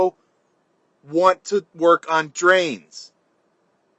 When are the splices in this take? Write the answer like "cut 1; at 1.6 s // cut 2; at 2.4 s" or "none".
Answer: none

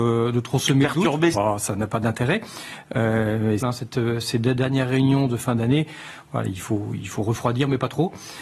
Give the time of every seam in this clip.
cut 1; at 1.3 s // cut 2; at 3.6 s

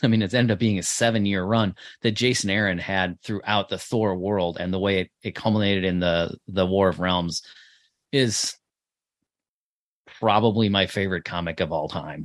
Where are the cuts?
none

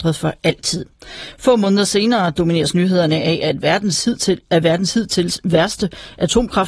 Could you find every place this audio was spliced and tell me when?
none

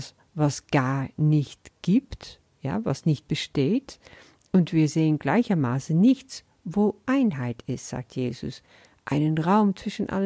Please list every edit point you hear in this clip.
none

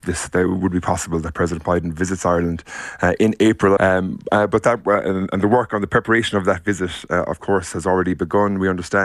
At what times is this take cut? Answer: cut 1; at 3.8 s

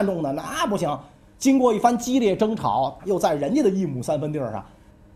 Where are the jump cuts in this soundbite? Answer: cut 1; at 3.0 s

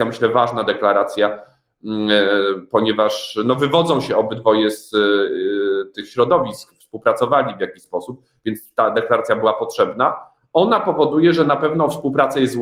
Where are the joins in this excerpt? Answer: none

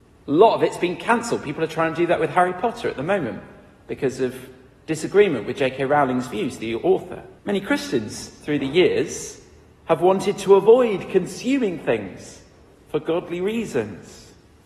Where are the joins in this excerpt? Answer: cut 1; at 7.4 s

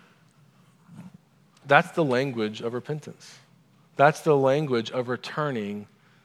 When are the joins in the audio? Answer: cut 1; at 1.6 s

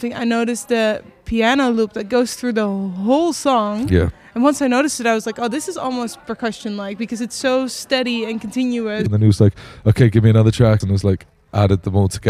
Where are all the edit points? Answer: cut 1; at 9.1 s // cut 2; at 10.8 s

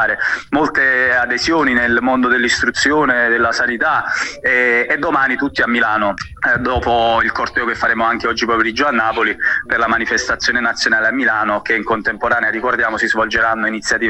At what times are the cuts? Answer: none

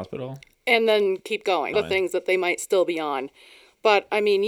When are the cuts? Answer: cut 1; at 1.7 s

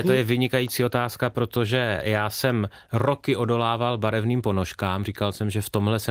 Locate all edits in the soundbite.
none

